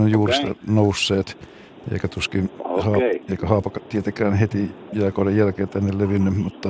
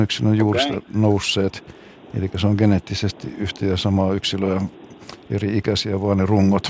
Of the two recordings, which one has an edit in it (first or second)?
first